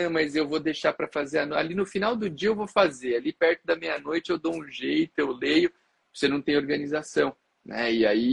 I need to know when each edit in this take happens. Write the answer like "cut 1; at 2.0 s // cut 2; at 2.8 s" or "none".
none